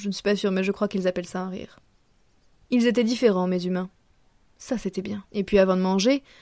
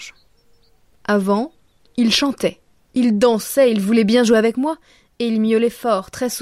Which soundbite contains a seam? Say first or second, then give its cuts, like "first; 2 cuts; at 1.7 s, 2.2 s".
first; 1 cut; at 5.3 s